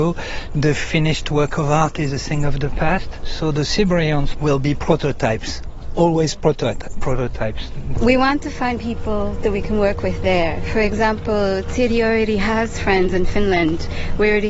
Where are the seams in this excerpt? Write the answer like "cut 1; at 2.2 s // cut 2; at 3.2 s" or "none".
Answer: cut 1; at 4.3 s // cut 2; at 8.0 s

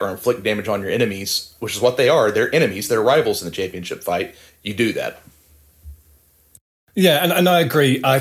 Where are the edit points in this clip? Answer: none

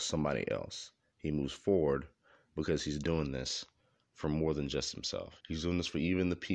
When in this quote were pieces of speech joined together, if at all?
cut 1; at 5.4 s

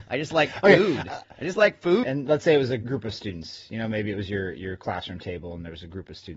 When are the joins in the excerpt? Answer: cut 1; at 2.0 s

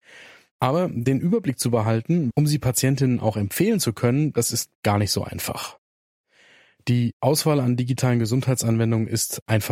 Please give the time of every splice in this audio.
cut 1; at 2.3 s

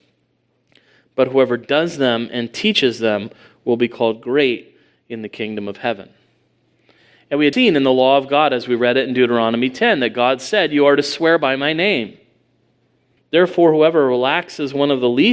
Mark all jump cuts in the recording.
cut 1; at 7.5 s // cut 2; at 13.2 s

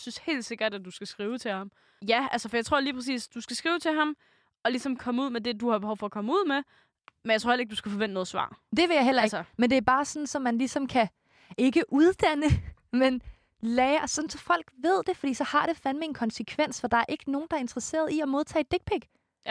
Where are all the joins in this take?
cut 1; at 2.0 s

